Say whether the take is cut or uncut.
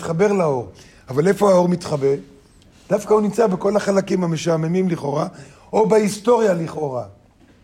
uncut